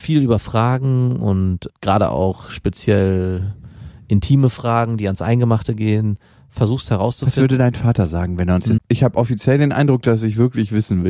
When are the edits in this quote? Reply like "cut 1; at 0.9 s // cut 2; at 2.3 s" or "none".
cut 1; at 1.7 s // cut 2; at 8.8 s